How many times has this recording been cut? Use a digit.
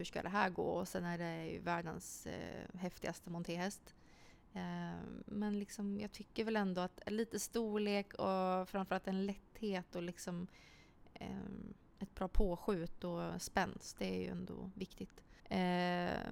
1